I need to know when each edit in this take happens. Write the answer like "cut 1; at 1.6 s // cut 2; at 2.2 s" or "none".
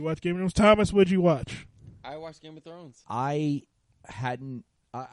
cut 1; at 3.0 s